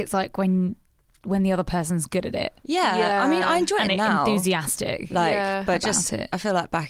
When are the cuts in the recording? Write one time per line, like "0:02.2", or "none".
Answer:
none